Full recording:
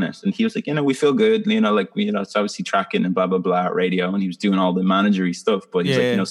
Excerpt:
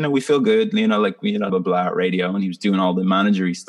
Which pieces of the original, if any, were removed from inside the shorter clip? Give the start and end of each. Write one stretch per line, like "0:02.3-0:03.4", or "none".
0:02.2-0:03.3